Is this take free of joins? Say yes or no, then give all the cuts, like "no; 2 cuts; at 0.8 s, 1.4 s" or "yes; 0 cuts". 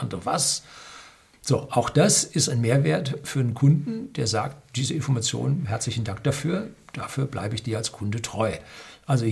no; 1 cut; at 1.3 s